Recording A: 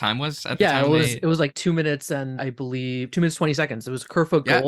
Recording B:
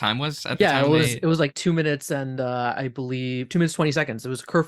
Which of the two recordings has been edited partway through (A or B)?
A